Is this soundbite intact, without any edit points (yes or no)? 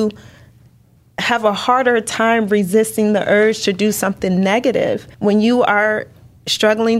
no